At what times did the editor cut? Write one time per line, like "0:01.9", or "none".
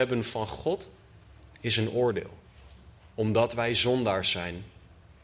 none